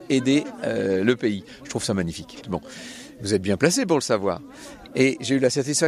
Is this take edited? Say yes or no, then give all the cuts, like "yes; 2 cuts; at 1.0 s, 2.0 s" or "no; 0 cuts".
yes; 2 cuts; at 2.4 s, 4.9 s